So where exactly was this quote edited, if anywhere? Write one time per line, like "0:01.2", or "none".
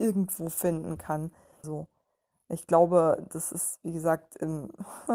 0:01.6